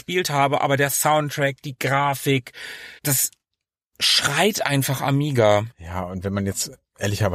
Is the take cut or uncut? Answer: uncut